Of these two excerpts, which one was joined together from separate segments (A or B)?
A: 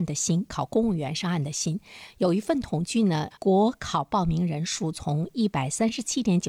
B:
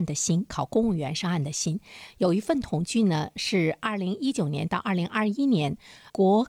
A